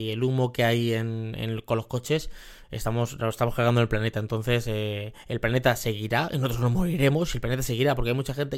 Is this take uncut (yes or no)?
yes